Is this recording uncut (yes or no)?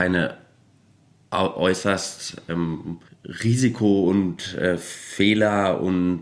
yes